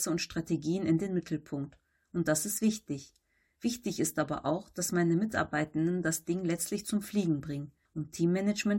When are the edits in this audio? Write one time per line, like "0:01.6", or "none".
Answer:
0:07.9

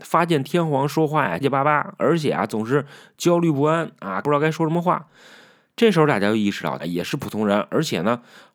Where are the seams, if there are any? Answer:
0:01.4
0:04.2
0:06.8

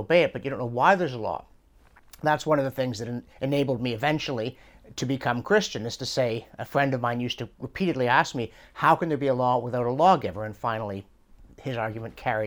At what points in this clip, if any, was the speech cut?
0:03.3

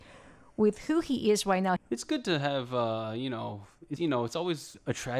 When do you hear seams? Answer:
0:01.8
0:04.0

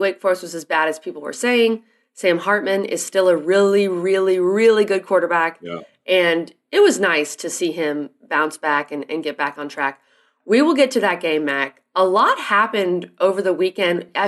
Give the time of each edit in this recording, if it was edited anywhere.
none

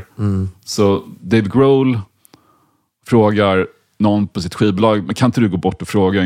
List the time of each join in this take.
none

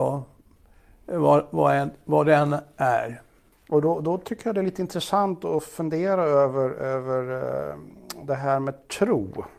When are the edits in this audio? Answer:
0:03.5

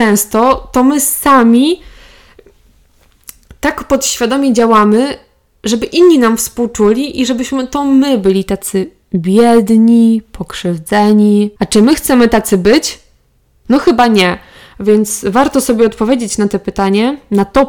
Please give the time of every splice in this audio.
0:11.6

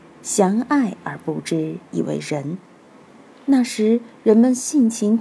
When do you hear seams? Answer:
none

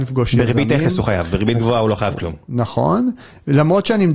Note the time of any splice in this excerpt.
none

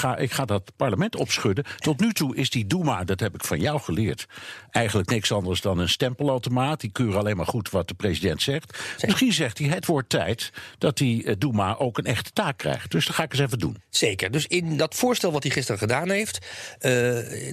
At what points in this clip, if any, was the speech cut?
none

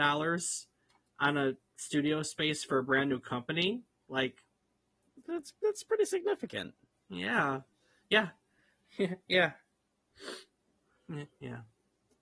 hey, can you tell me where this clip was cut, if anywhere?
none

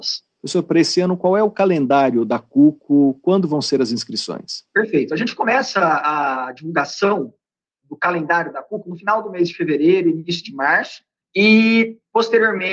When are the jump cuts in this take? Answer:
0:11.2

